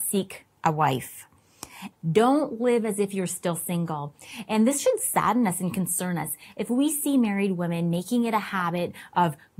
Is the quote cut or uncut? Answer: cut